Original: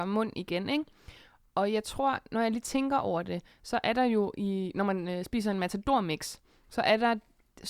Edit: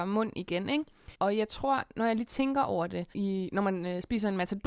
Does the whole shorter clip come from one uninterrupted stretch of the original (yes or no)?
no